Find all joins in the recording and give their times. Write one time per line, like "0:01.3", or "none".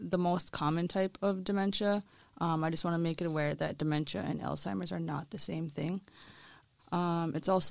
0:06.8

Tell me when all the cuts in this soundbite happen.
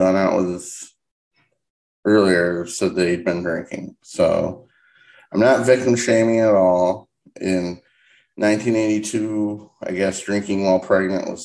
none

